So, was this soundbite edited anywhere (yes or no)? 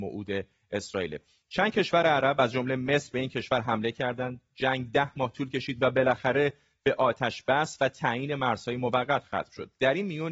no